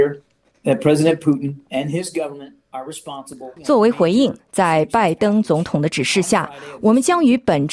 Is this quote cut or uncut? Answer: cut